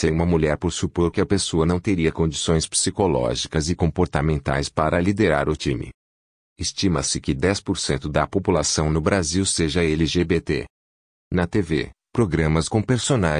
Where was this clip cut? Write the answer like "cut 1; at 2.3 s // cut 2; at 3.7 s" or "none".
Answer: none